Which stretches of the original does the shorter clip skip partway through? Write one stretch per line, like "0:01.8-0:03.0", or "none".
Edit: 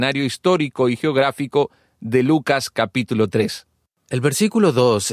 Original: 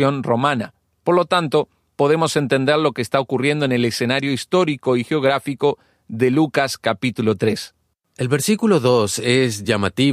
none